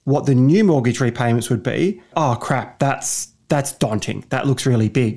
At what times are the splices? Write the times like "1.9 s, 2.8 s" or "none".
2.1 s